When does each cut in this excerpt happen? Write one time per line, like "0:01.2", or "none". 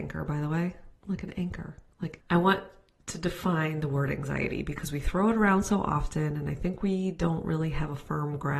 0:01.0
0:02.2